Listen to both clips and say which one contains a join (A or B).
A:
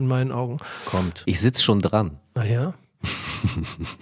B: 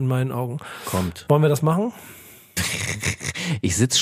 A